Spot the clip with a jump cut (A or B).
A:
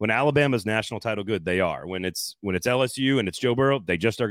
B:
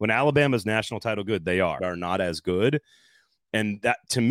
B